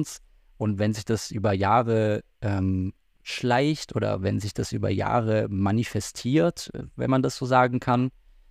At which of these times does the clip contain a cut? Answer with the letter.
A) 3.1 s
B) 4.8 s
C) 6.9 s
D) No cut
A